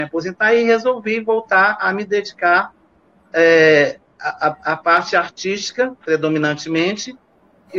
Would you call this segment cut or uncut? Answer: uncut